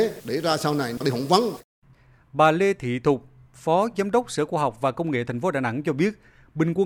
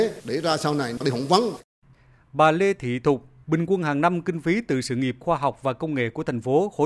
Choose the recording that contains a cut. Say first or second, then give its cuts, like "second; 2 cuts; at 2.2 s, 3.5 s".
second; 1 cut; at 3.4 s